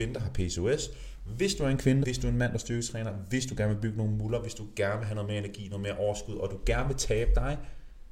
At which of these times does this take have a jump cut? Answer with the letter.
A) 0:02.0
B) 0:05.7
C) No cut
A